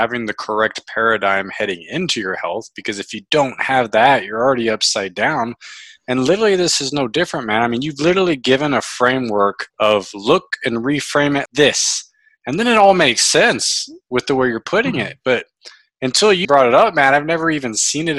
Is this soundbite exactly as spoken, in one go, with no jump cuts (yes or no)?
no